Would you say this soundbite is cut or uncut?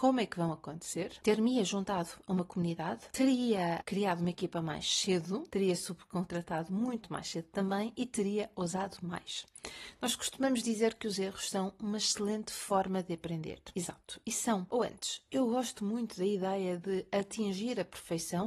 cut